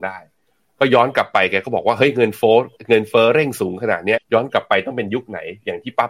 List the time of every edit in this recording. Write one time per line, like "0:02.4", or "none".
0:04.2